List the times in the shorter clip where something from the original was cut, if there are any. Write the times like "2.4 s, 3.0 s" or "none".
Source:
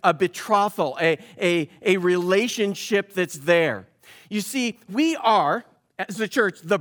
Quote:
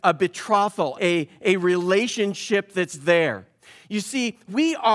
0.9 s